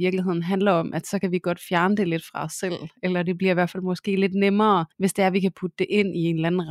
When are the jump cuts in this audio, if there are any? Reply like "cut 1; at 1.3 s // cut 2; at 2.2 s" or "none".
cut 1; at 4.9 s

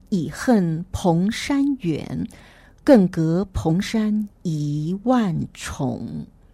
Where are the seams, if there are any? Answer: none

